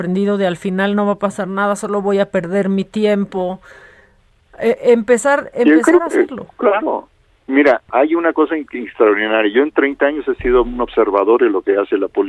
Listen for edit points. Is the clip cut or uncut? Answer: uncut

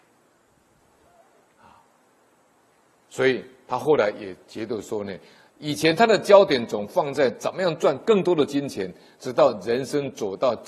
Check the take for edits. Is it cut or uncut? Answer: uncut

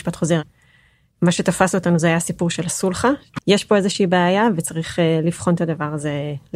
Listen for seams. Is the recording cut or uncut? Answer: cut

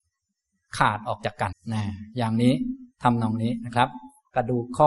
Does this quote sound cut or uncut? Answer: cut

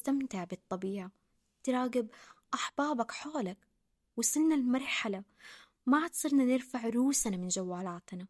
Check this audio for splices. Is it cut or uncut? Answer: uncut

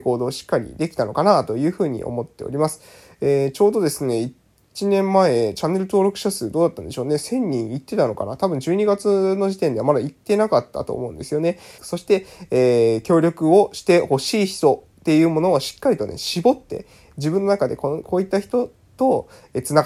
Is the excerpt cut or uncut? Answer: cut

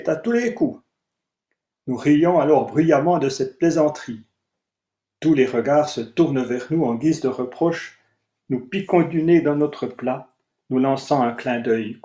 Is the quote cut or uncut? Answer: uncut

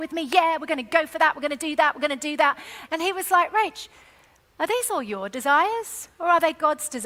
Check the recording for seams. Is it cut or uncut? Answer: uncut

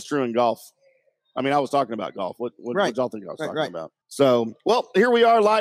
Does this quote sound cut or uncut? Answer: cut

